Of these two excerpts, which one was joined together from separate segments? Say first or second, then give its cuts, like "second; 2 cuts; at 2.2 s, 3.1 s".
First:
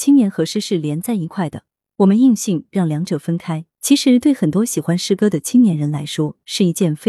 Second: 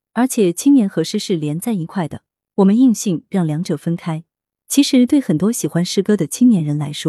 first; 1 cut; at 3.7 s